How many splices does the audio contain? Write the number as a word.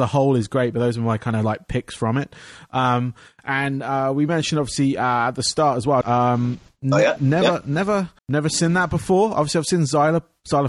two